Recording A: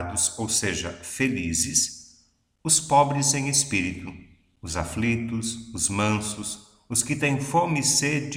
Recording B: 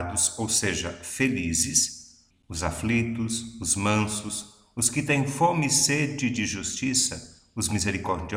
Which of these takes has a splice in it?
B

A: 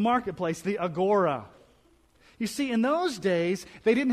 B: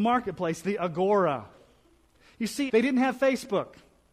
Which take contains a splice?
B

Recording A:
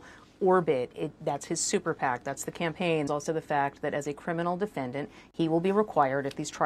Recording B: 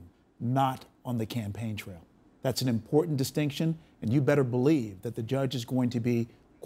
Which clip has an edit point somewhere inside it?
A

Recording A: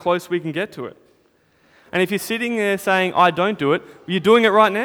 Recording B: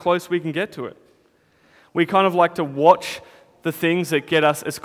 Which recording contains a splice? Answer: A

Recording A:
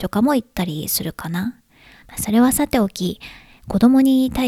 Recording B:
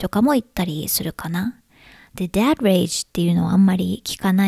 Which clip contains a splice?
A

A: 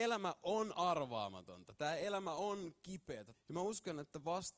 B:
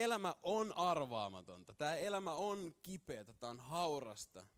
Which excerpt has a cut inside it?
A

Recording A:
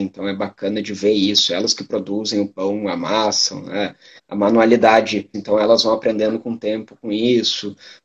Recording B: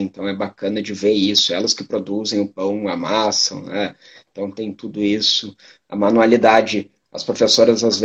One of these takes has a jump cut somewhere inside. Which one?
A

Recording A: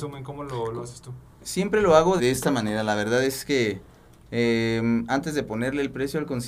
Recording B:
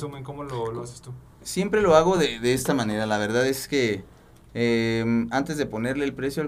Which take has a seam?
A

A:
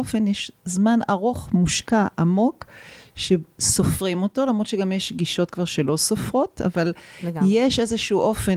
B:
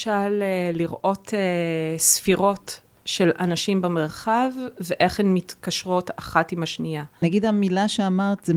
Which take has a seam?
B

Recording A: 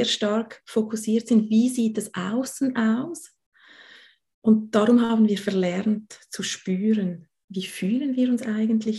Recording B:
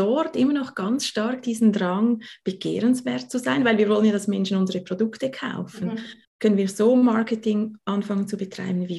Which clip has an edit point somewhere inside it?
B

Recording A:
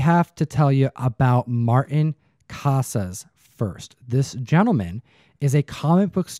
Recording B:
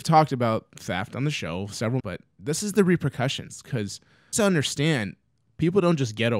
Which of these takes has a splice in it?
B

